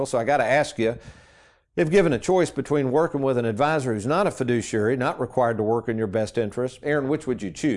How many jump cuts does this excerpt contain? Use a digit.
1